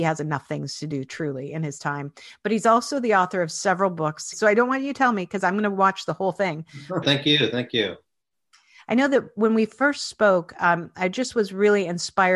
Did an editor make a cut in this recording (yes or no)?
yes